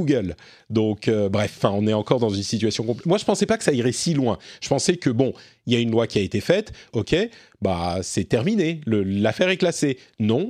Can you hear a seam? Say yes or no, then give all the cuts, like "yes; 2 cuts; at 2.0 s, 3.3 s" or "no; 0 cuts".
yes; 1 cut; at 6.9 s